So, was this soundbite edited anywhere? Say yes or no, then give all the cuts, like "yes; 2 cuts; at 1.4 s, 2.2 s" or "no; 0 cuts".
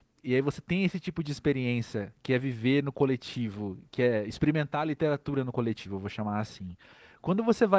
no; 0 cuts